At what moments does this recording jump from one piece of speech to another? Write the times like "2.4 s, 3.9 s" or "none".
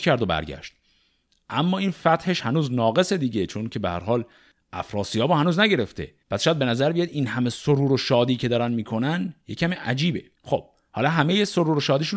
6.2 s, 10.3 s